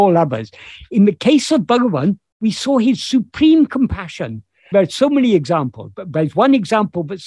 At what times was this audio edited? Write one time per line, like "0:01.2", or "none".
0:04.7